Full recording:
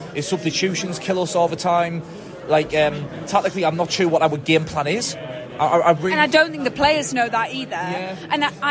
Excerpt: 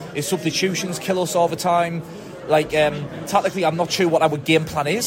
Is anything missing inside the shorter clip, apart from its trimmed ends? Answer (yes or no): no